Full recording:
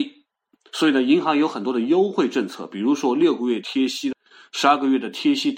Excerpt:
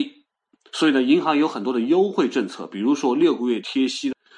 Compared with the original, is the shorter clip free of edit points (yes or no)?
yes